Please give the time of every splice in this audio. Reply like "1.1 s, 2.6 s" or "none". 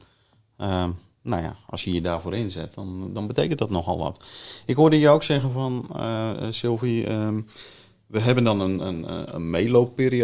none

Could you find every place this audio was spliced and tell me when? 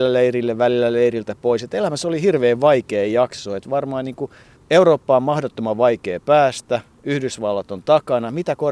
none

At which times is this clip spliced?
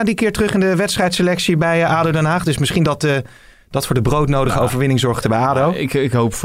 none

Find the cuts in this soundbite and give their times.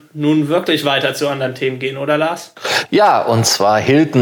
none

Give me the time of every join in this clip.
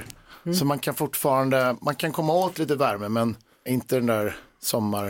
3.7 s

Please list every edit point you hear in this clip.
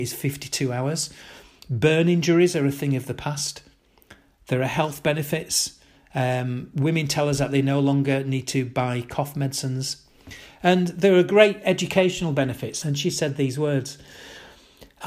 12.8 s

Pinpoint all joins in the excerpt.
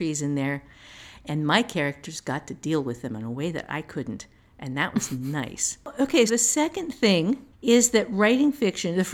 6.3 s, 7.5 s

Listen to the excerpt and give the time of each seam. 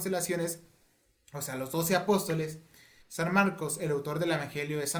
3.0 s

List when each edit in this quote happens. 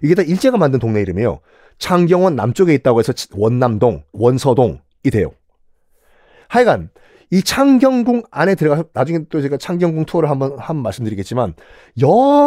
4.1 s

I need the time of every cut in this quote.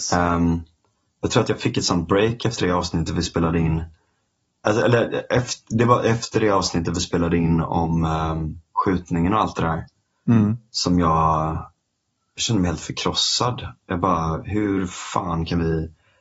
none

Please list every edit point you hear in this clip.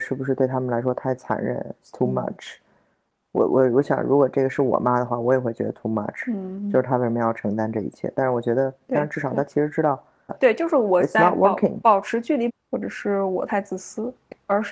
8.9 s, 10.3 s, 12.5 s

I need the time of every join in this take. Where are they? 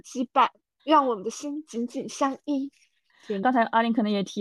3.4 s

